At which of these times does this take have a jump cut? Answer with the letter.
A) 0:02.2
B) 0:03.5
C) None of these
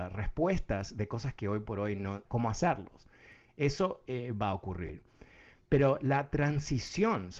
A